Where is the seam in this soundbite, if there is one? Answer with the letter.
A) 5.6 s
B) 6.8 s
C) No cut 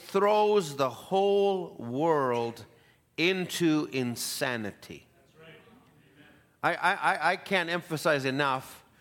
C